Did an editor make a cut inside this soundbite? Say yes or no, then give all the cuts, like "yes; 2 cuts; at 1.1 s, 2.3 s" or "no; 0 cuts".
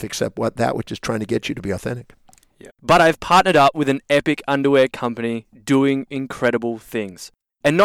yes; 1 cut; at 2.7 s